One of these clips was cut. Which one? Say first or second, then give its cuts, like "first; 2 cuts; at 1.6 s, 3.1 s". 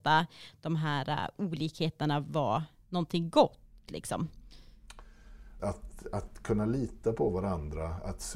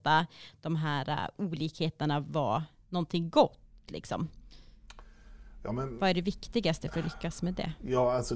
first; 1 cut; at 5.6 s